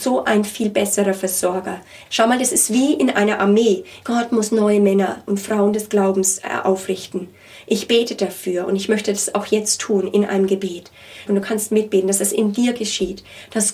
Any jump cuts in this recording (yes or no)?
yes